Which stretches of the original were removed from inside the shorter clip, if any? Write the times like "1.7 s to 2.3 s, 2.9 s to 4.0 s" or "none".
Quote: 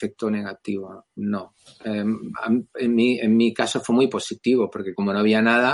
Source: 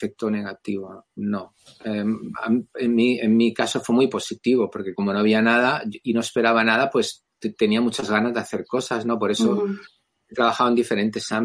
none

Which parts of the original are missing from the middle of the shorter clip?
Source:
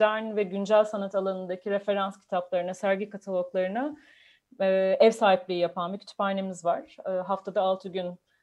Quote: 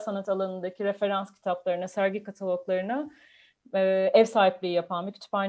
none

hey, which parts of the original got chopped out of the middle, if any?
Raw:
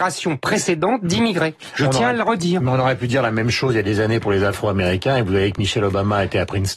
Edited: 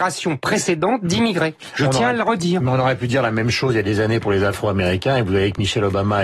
none

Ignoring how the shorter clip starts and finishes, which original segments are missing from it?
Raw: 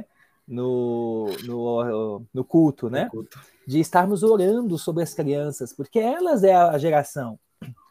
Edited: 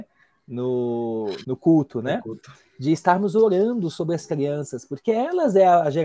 1.4 s to 2.3 s

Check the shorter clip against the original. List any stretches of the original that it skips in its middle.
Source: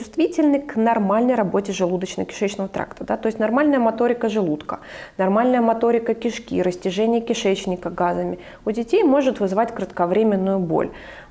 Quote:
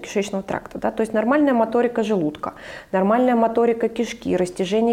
none

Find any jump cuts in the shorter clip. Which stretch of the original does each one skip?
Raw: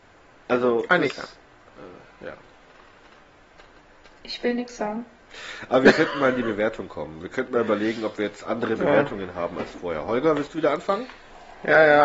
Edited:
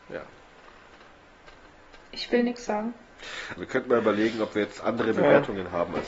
5.7 s to 7.2 s

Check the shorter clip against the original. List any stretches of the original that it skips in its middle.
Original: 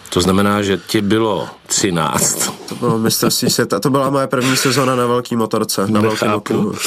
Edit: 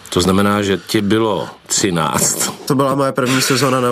2.7 s to 3.8 s

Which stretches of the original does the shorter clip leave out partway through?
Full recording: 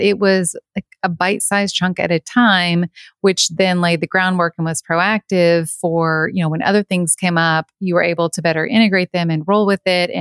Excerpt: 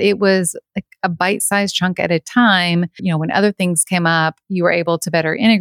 3.0 s to 6.3 s

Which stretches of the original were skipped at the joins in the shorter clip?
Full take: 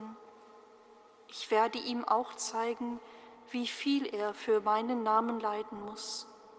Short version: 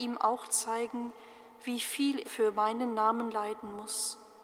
4.1 s to 4.3 s

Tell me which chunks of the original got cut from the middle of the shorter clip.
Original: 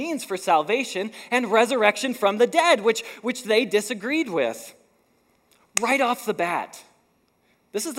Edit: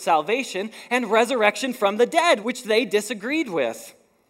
2.8 s to 3.2 s

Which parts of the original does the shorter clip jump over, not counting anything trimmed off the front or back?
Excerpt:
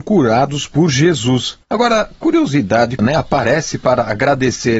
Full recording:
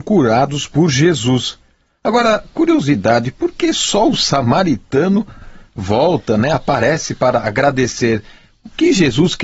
1.6 s to 2.0 s, 3.3 s to 6.4 s

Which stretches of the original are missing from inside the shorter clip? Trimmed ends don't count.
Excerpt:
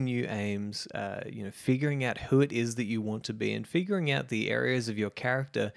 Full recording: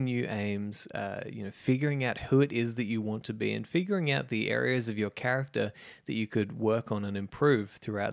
none

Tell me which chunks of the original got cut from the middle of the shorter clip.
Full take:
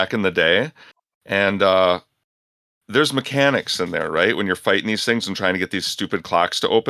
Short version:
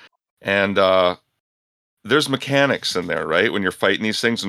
none

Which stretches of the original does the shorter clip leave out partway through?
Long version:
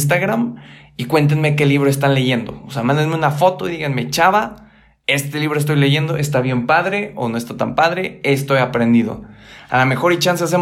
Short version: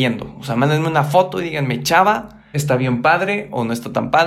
4.8 s to 6.2 s

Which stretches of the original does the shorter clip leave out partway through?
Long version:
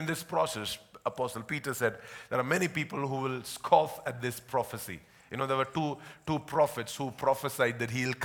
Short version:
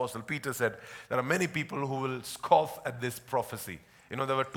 none

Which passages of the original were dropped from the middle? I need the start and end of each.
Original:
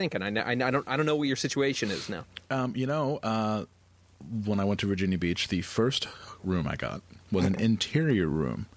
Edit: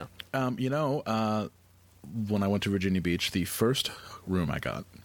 none

